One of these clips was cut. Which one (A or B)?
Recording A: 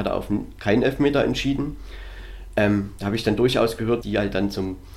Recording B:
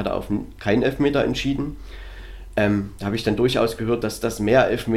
A